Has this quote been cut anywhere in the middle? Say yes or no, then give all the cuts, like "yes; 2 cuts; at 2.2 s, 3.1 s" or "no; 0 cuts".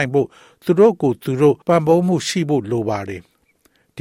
yes; 1 cut; at 1.6 s